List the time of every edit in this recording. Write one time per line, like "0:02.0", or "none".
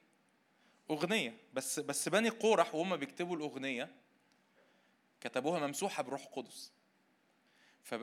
none